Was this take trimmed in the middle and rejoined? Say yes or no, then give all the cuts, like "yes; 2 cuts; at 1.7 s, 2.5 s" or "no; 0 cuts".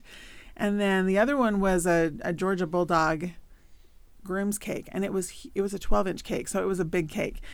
no; 0 cuts